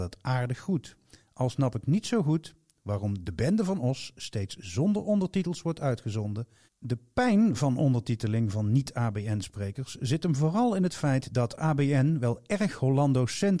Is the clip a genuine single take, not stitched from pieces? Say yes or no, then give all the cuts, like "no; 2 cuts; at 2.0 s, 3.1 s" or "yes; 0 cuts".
no; 1 cut; at 6.7 s